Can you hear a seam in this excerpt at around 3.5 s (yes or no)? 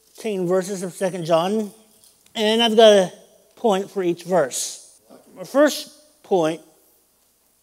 no